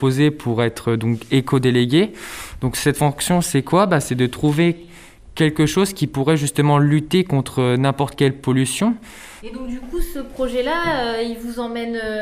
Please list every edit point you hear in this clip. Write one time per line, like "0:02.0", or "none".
0:09.4